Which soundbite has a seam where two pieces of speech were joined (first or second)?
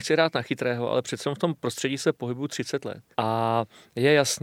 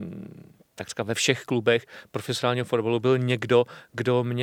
first